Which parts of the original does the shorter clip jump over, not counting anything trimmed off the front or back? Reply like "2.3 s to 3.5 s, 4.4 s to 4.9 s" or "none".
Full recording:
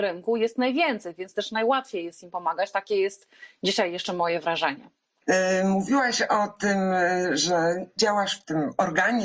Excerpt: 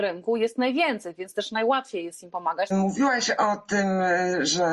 2.7 s to 5.6 s